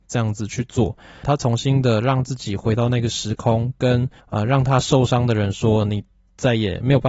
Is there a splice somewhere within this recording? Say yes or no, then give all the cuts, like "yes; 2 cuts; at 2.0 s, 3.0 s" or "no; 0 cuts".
yes; 2 cuts; at 1.2 s, 4.2 s